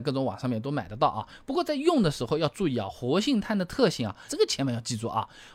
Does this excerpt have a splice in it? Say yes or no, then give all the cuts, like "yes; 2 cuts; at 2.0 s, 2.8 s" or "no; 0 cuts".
yes; 1 cut; at 4.3 s